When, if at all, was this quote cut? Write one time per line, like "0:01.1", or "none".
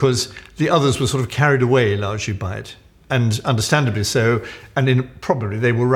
none